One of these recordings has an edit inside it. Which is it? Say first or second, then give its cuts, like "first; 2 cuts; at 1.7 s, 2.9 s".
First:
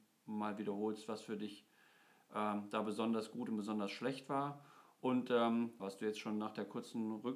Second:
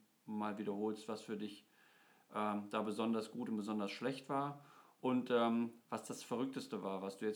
first; 1 cut; at 5.8 s